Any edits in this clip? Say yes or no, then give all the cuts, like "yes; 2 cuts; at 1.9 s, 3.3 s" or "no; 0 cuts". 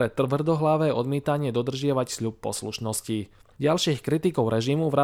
yes; 1 cut; at 3.6 s